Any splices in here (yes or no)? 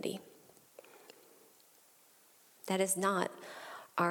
yes